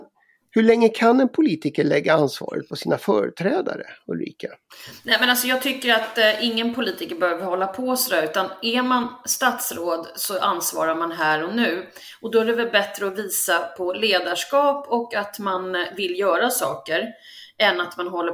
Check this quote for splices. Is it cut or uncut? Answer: uncut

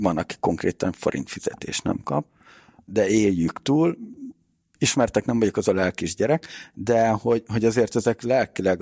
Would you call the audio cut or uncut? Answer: uncut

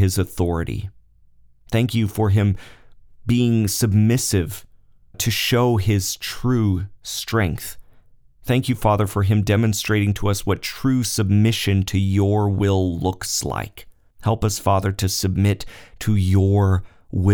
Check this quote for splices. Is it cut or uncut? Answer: cut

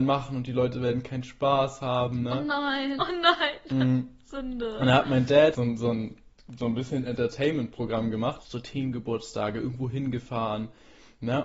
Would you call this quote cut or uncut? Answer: cut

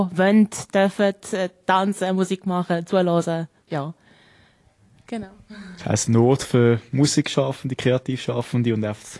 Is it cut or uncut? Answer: uncut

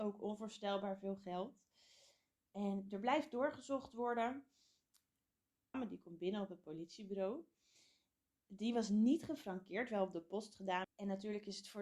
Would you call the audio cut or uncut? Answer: cut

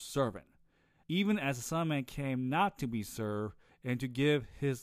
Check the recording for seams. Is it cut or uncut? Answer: cut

